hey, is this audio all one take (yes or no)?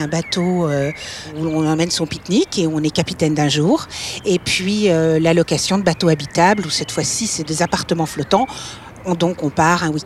yes